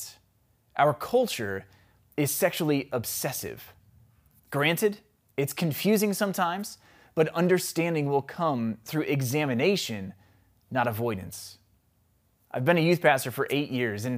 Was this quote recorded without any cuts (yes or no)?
no